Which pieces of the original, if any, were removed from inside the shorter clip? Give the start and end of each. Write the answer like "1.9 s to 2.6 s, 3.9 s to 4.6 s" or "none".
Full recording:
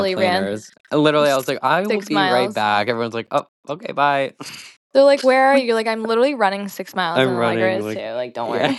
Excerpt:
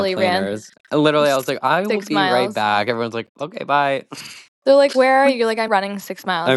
3.3 s to 3.6 s, 6.0 s to 6.4 s